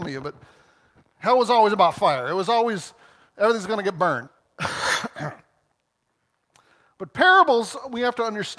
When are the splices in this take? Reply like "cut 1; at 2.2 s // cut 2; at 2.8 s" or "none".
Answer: cut 1; at 4.3 s